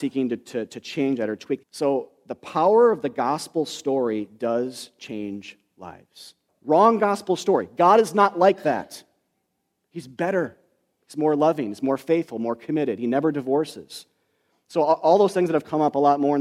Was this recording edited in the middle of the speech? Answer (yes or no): yes